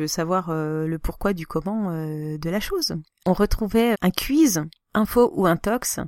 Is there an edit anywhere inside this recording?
yes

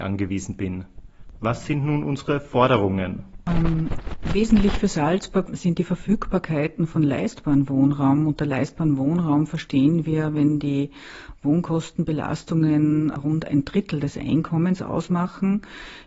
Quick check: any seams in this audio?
yes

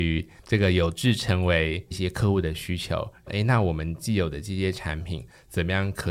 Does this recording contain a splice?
yes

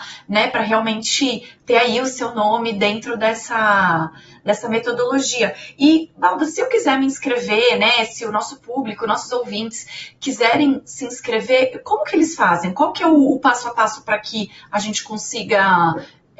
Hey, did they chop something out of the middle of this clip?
no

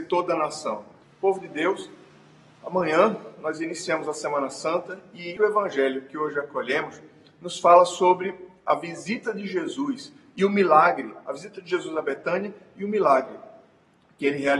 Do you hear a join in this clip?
yes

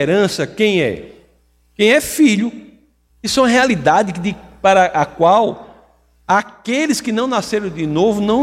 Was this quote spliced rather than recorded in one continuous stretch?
yes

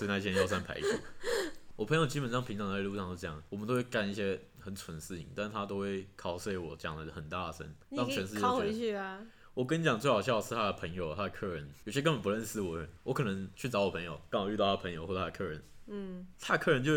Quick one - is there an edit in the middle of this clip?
yes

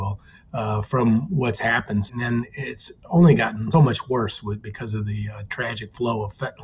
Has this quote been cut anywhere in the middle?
yes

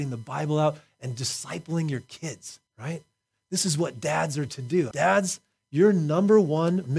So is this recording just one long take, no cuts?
no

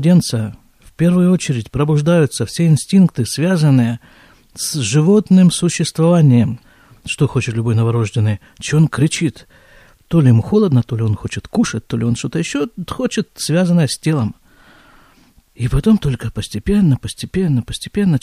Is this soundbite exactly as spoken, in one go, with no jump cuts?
yes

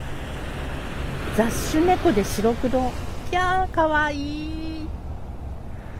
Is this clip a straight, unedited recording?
yes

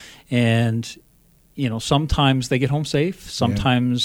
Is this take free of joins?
yes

